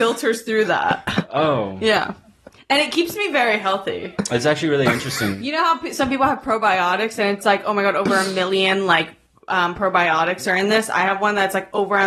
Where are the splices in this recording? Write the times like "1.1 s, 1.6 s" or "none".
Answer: none